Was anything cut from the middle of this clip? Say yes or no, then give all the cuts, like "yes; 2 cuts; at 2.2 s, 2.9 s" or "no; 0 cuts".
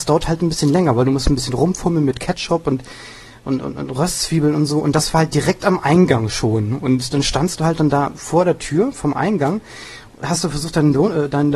no; 0 cuts